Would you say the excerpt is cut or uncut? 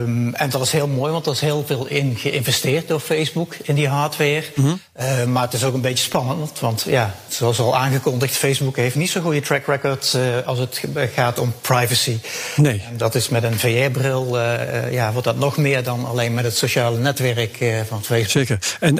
uncut